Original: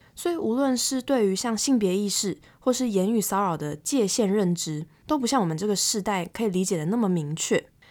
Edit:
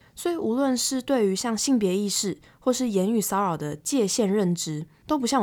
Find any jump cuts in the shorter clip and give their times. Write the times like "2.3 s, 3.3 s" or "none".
none